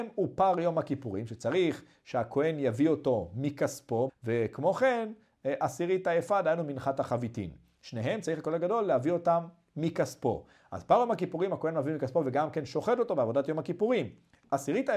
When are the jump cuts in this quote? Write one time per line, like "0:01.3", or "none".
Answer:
0:04.1